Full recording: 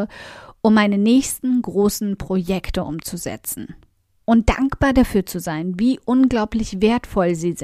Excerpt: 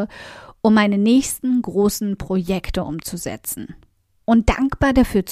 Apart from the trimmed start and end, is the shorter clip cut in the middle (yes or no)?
no